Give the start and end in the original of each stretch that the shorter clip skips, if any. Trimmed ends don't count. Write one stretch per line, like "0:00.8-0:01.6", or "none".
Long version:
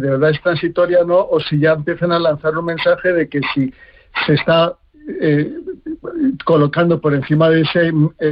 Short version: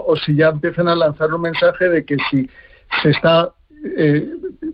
none